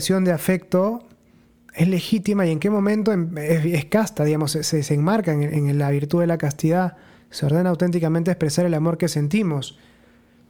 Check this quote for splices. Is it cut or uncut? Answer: uncut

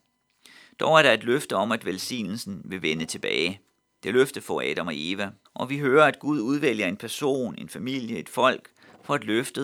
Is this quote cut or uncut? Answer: cut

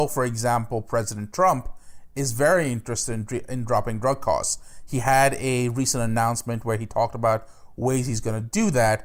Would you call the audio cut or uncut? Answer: uncut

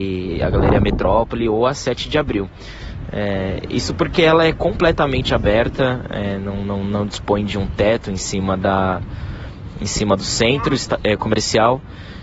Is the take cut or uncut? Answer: uncut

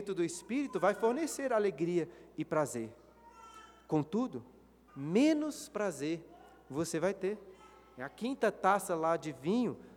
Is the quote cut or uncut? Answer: cut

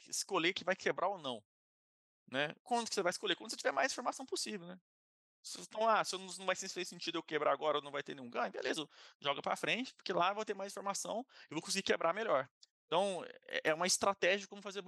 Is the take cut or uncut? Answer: uncut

